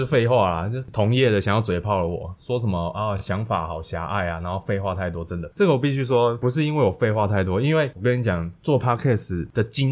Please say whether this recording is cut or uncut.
uncut